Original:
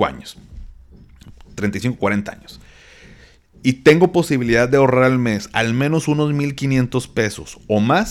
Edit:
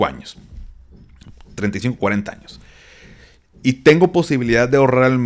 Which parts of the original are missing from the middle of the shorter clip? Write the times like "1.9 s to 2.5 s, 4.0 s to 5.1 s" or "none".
none